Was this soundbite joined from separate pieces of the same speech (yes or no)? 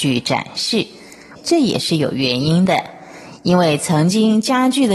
yes